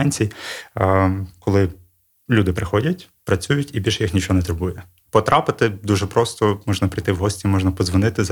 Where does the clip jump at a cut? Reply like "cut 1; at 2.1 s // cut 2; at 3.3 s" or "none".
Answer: cut 1; at 3.2 s // cut 2; at 5.1 s